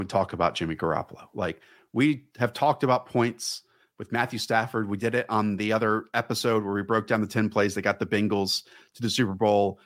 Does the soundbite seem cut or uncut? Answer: uncut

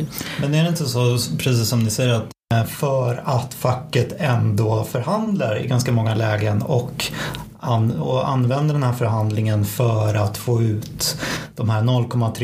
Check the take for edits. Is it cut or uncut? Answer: uncut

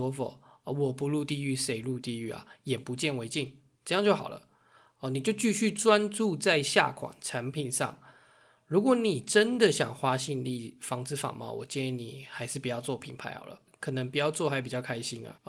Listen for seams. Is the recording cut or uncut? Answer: uncut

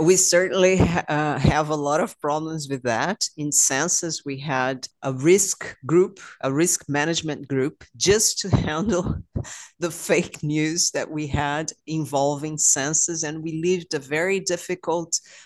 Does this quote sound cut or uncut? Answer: uncut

